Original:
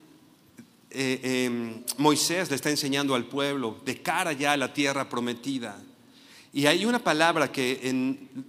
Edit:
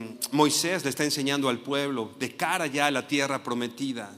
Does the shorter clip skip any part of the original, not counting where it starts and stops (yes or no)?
no